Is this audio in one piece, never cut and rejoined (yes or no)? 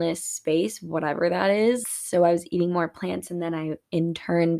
no